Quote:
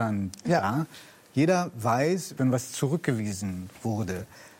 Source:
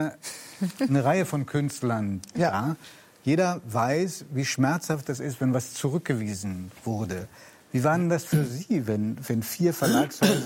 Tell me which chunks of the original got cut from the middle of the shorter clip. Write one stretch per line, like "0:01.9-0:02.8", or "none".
0:04.3-0:05.4